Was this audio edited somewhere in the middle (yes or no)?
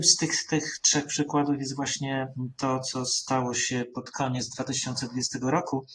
no